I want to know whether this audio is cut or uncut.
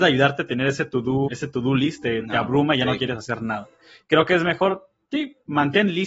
cut